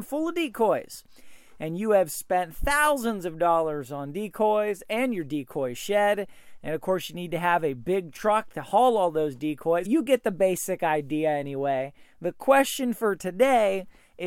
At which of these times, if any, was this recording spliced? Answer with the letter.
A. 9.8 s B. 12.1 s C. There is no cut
A